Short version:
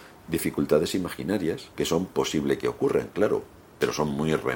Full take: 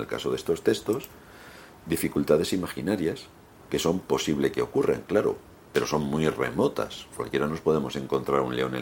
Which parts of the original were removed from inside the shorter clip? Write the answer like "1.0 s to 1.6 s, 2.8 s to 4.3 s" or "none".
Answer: 3.3 s to 3.7 s